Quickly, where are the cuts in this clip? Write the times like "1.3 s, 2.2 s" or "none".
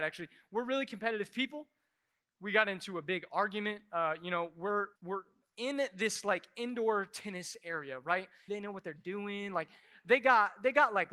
5.0 s, 8.5 s